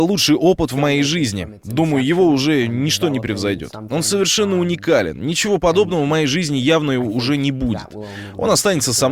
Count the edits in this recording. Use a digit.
0